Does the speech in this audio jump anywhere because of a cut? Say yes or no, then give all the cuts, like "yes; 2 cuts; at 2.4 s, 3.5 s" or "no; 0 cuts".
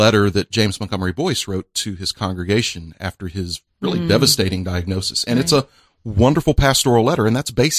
no; 0 cuts